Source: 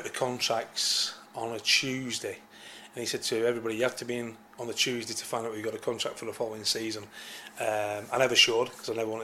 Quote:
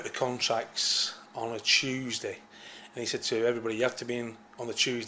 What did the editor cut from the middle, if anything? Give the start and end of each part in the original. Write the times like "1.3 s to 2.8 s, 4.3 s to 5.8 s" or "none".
none